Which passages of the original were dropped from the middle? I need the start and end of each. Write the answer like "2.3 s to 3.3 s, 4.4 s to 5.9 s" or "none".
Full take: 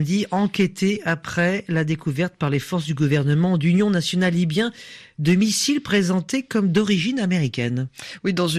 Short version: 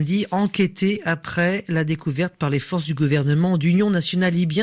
none